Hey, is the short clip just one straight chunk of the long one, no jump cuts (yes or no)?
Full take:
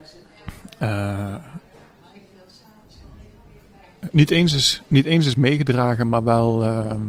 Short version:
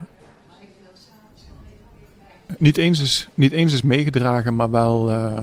yes